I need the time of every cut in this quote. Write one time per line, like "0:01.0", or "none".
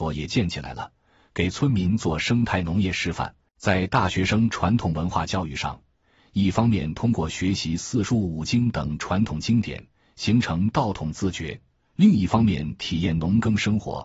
0:03.5